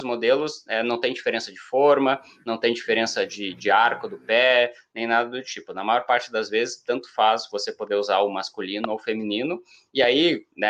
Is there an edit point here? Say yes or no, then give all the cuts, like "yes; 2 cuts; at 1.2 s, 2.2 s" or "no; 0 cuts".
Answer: no; 0 cuts